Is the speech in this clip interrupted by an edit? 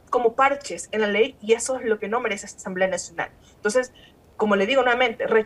no; 0 cuts

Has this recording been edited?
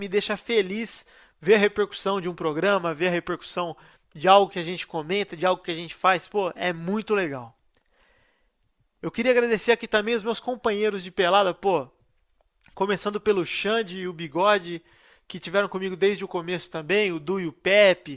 no; 0 cuts

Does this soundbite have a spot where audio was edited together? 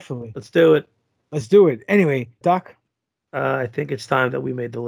yes; 1 cut; at 2.4 s

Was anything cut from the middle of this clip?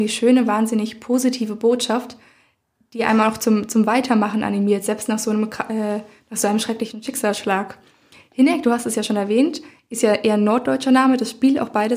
no; 0 cuts

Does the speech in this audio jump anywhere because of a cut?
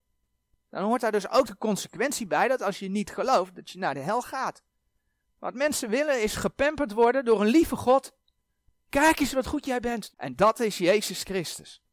yes; 2 cuts; at 5.2 s, 10.1 s

